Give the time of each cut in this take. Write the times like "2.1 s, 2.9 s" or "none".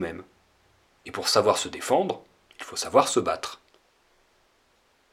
1.0 s